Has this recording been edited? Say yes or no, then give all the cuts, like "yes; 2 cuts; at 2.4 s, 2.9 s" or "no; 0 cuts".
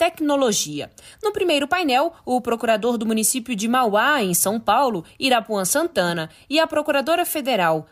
no; 0 cuts